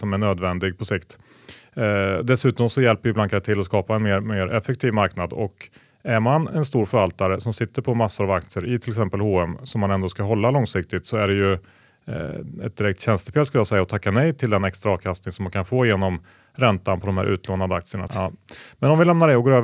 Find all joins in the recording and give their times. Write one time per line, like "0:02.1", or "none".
0:18.1